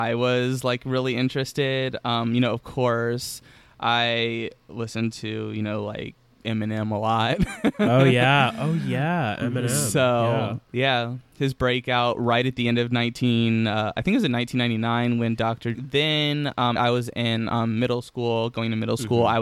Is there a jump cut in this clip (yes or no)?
yes